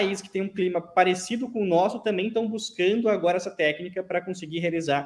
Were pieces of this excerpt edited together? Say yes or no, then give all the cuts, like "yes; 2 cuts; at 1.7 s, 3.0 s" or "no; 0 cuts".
no; 0 cuts